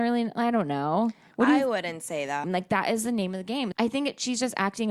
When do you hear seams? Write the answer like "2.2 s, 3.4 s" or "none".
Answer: 2.4 s, 3.7 s

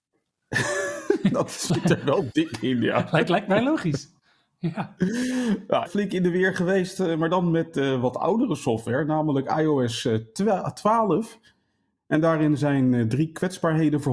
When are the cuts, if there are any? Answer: 5.8 s, 12.0 s

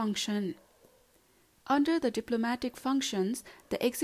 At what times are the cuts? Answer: 1.6 s

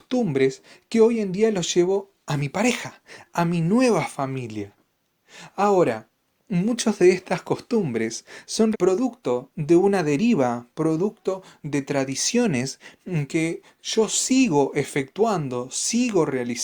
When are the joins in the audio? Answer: 8.7 s

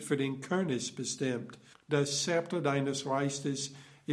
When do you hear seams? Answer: 1.7 s

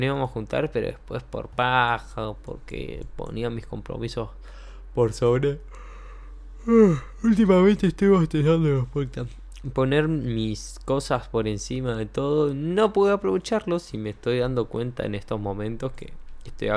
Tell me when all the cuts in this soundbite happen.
none

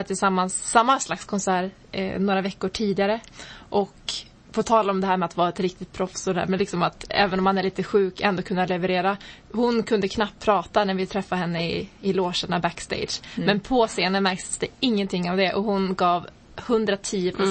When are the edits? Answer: none

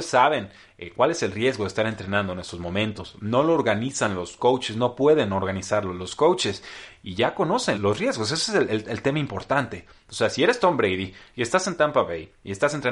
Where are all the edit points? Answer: 7.7 s

